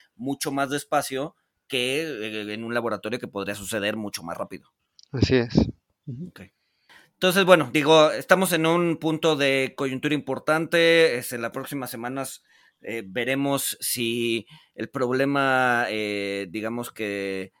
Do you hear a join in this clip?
no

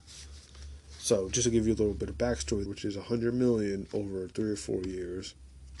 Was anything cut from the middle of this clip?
yes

